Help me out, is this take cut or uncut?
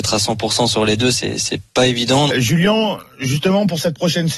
cut